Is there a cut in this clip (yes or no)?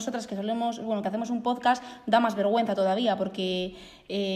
no